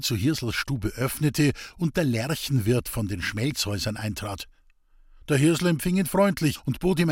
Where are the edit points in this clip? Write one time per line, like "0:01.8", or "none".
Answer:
none